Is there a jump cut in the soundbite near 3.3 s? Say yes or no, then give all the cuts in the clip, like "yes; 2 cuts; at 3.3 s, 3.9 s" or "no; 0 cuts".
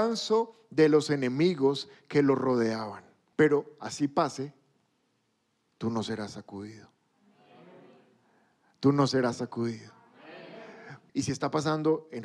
yes; 2 cuts; at 3.3 s, 11.1 s